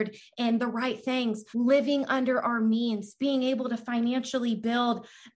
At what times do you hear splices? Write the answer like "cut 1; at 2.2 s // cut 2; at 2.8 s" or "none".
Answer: cut 1; at 1.5 s